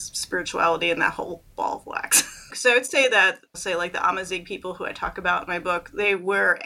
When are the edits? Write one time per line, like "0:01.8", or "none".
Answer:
0:02.5